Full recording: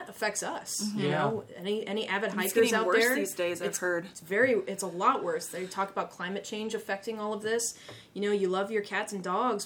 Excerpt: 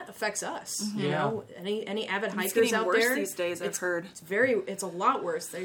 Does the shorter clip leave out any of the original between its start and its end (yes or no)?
no